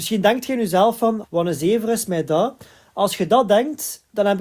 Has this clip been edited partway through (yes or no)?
yes